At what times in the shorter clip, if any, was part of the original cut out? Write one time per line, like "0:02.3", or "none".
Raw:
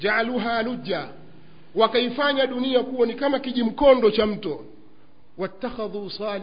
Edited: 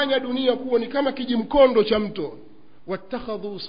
0:02.8